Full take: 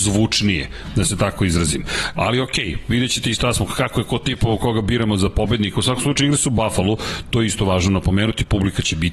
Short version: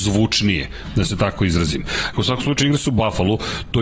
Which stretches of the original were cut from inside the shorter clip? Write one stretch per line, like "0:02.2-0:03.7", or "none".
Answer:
0:02.1-0:05.7